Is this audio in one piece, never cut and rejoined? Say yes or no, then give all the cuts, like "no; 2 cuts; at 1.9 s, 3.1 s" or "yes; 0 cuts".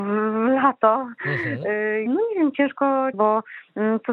no; 2 cuts; at 2.1 s, 3.1 s